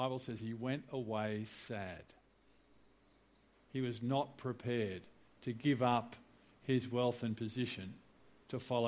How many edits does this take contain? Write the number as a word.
one